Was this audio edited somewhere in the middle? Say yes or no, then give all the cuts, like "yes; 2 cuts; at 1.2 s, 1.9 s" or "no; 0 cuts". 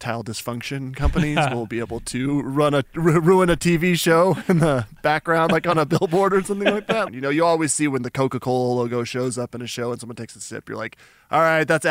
yes; 1 cut; at 7.1 s